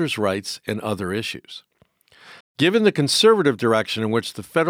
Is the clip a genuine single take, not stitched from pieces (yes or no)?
no